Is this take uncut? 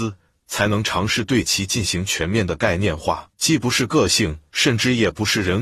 no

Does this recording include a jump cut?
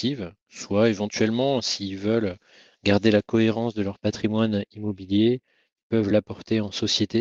no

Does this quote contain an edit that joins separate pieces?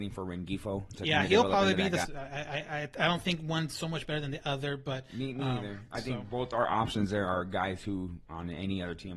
yes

